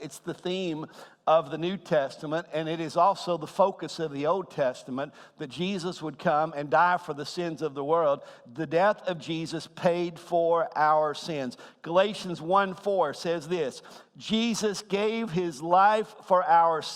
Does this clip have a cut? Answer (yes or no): no